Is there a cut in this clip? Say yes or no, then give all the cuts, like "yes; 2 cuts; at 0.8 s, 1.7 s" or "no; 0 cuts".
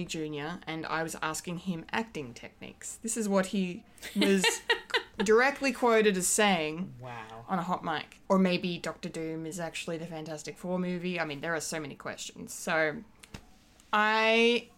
yes; 1 cut; at 8.3 s